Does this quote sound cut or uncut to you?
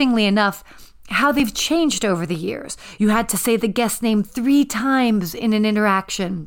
cut